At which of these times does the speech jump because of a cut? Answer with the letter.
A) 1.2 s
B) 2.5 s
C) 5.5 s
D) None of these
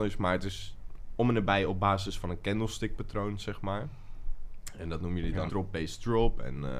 C